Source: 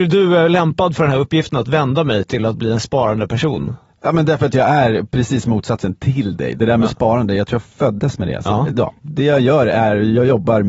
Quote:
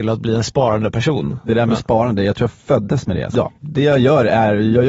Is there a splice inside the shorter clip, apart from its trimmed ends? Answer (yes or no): yes